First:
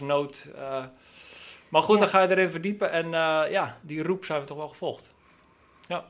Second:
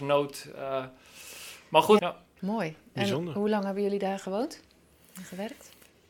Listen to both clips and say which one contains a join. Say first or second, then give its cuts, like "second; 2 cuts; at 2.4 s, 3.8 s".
second; 1 cut; at 2.0 s